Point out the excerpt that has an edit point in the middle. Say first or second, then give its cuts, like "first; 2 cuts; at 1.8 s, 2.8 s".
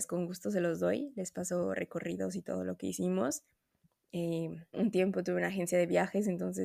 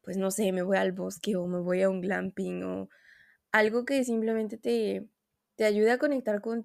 first; 1 cut; at 4.7 s